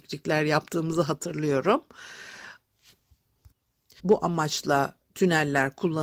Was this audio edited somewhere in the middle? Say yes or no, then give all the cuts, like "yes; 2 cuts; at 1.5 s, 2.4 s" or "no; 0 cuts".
yes; 1 cut; at 4.0 s